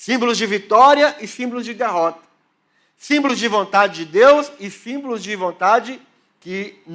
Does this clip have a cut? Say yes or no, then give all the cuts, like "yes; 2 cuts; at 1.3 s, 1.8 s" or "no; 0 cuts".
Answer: no; 0 cuts